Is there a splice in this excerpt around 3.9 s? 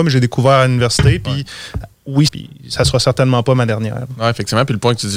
no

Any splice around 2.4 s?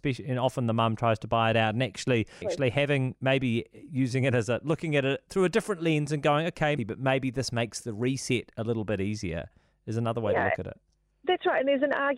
yes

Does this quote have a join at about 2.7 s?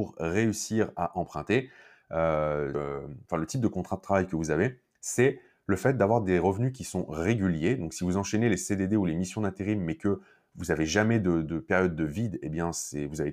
yes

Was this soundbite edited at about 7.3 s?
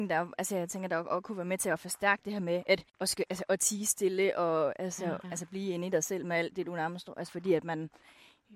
yes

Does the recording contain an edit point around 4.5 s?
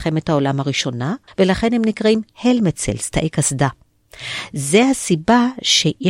no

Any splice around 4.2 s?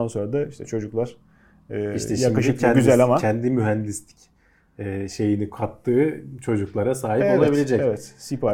no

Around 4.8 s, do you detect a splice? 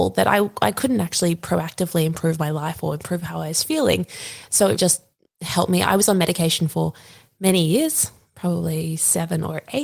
yes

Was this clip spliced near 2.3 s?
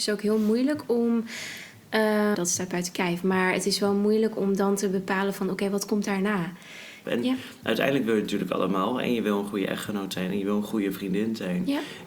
yes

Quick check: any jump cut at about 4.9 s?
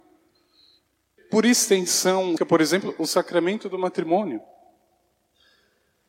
no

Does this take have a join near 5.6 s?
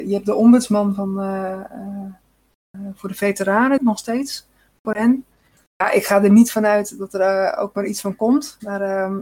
yes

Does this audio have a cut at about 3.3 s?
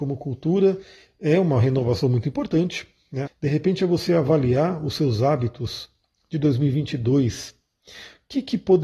yes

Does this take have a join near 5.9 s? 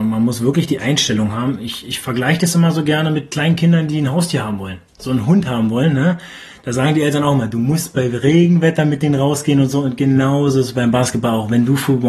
no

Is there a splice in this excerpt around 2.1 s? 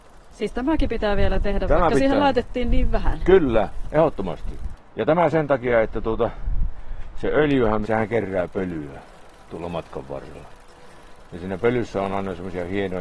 no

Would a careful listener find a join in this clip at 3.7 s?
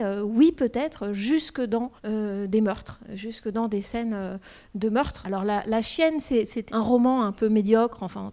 no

